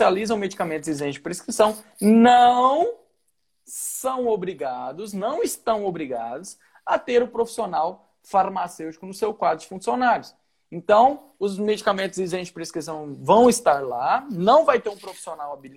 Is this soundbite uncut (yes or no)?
yes